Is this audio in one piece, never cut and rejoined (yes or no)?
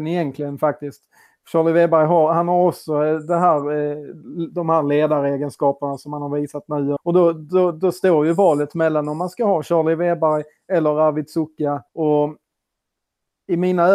no